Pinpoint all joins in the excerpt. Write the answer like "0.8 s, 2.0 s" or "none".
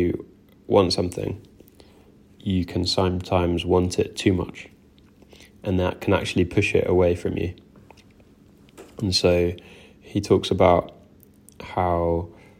none